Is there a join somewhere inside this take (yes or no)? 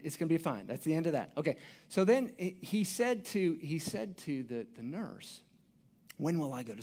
no